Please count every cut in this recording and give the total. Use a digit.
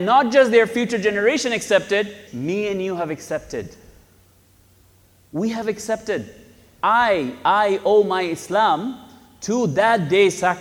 1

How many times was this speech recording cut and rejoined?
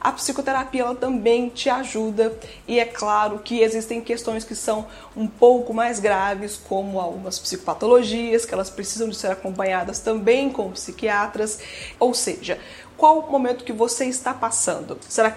1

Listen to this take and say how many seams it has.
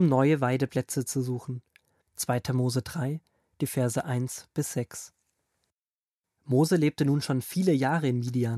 1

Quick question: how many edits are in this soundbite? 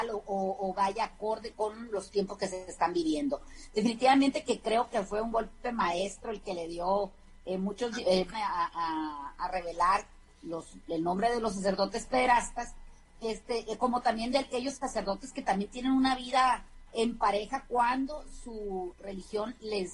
2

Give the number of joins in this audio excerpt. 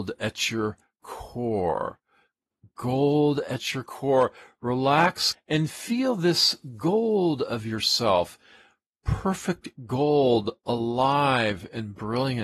1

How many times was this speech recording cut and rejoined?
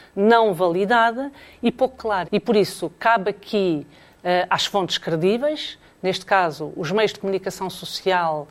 1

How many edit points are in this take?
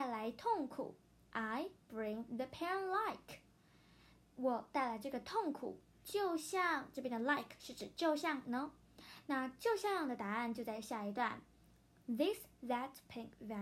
0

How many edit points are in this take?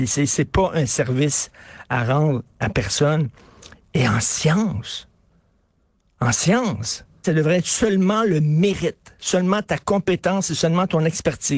1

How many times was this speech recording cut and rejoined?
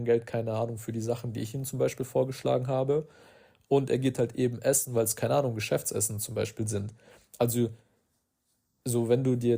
0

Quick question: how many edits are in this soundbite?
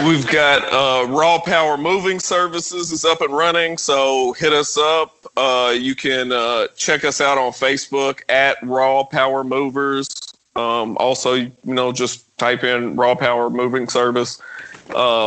0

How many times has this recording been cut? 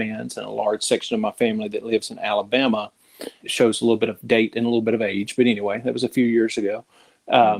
1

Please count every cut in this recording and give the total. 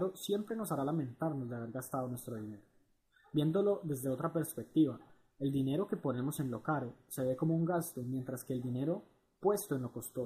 0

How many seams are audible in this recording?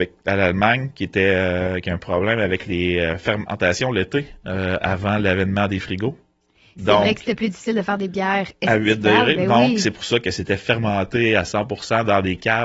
0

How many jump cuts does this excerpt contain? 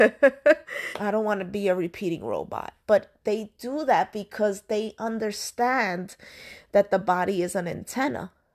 1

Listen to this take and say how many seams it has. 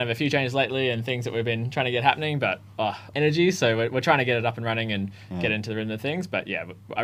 1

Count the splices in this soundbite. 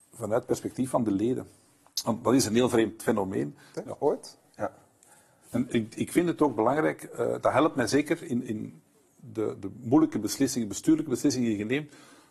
1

